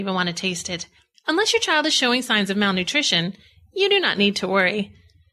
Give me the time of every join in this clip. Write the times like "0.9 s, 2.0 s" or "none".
1.1 s